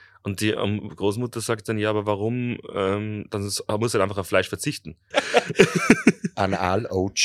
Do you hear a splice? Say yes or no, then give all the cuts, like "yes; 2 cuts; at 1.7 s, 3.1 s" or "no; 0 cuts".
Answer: yes; 1 cut; at 5.1 s